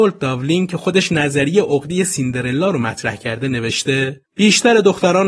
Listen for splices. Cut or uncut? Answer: cut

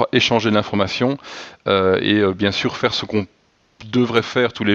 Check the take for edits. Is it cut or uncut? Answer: uncut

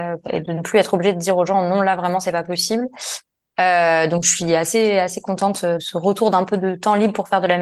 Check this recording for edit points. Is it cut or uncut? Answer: cut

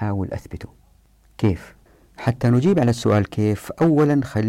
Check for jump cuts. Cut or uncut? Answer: uncut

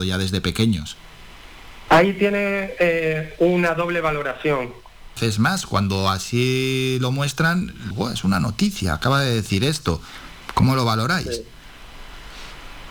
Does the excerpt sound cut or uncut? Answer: cut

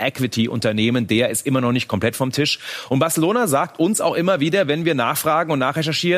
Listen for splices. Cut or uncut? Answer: uncut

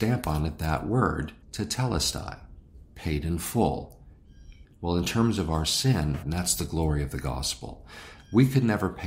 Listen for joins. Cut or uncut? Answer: cut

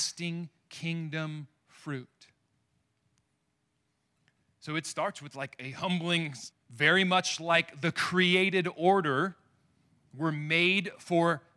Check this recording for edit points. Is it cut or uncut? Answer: cut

